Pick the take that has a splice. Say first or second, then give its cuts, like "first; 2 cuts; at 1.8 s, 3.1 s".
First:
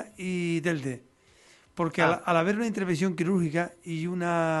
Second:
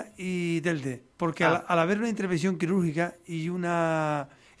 second; 1 cut; at 1.1 s